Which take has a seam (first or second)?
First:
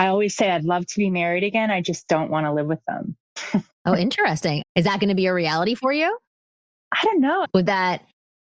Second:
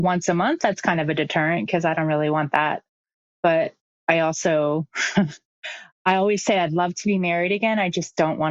first